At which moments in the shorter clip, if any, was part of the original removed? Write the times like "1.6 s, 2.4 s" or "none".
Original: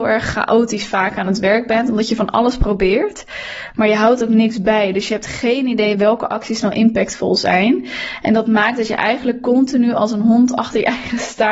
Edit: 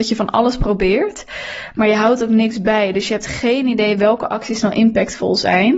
none